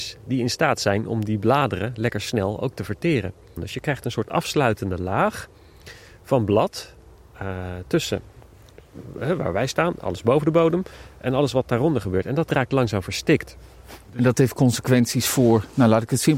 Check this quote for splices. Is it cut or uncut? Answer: uncut